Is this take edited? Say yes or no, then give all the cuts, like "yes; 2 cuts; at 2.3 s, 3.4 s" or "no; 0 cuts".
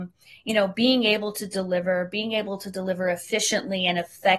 no; 0 cuts